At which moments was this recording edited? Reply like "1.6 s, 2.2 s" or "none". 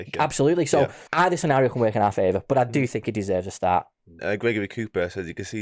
1.1 s, 4.2 s